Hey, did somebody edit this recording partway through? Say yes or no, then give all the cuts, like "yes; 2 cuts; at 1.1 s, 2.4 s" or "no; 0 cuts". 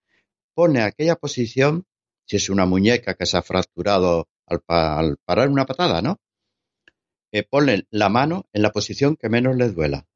no; 0 cuts